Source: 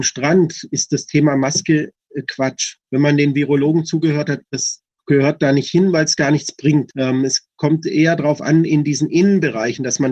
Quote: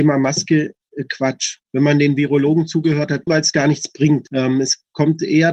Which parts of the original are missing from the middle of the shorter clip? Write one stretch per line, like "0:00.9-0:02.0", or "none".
0:04.5-0:05.9

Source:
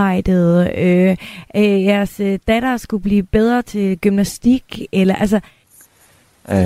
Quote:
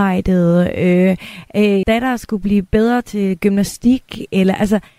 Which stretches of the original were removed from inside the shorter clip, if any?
0:01.8-0:02.4

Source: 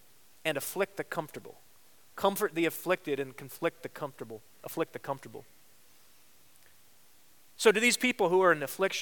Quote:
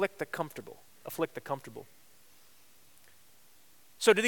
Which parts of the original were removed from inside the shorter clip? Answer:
0:01.7-0:04.5

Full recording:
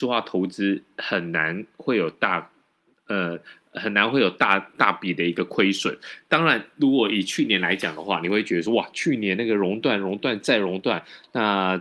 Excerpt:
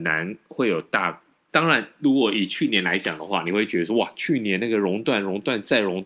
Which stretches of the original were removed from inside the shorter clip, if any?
0:02.8-0:06.2

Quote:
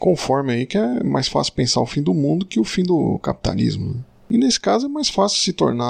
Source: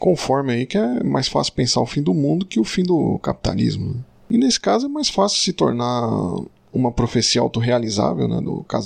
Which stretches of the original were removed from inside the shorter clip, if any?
none

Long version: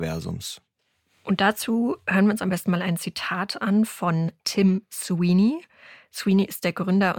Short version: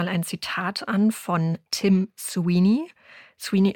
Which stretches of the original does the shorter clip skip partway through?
none

